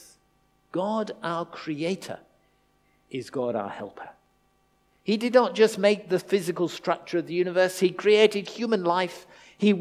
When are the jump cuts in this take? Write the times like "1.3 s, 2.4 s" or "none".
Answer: none